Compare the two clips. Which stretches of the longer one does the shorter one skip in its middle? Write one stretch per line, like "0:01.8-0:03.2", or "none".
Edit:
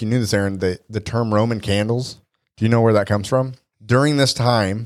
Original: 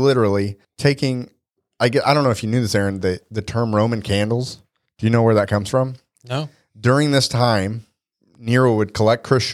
0:06.1-0:06.7